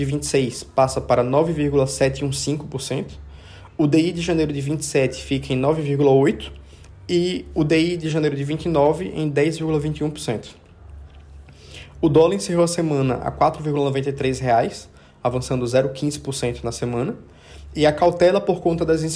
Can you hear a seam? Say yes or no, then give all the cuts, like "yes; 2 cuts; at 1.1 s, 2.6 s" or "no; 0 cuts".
no; 0 cuts